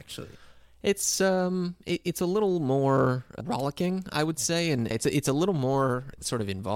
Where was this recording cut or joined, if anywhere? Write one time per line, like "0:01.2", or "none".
none